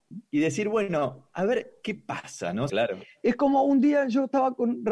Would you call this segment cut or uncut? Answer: cut